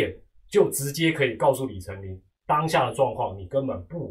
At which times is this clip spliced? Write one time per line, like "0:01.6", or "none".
none